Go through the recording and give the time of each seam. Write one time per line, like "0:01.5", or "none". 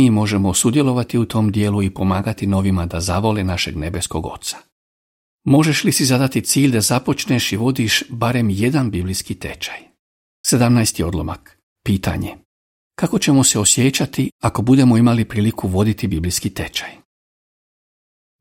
0:10.4